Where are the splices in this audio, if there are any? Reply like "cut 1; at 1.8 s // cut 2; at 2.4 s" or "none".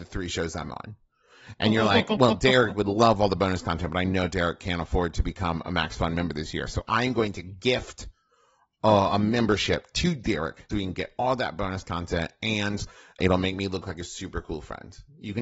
cut 1; at 10.7 s // cut 2; at 13.2 s